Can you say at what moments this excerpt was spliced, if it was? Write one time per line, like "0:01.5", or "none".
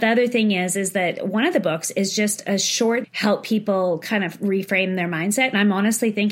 0:03.0